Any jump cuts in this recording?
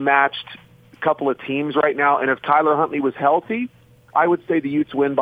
no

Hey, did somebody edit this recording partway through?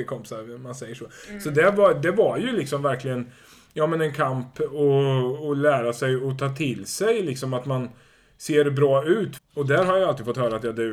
yes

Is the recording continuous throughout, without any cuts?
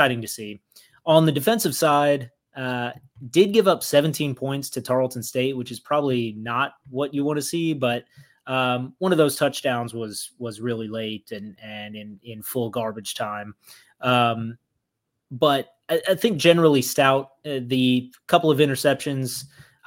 yes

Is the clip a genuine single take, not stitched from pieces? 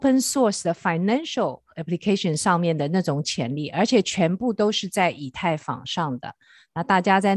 yes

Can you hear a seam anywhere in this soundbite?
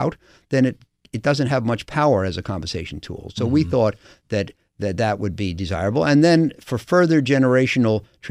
no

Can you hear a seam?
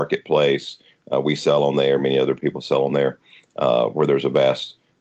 no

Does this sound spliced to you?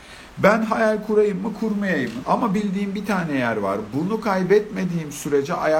yes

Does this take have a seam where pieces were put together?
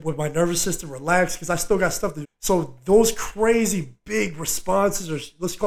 yes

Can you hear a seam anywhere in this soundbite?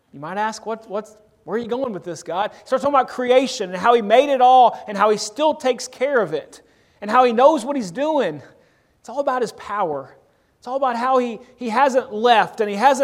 no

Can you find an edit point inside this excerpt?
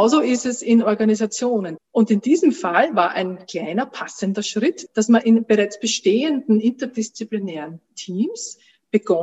yes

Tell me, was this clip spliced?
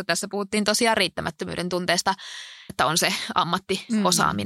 yes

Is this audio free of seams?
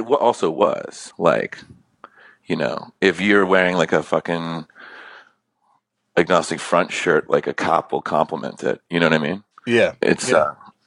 yes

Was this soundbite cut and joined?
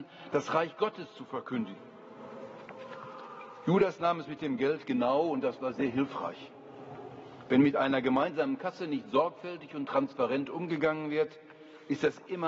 no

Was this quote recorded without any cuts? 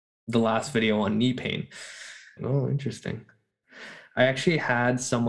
no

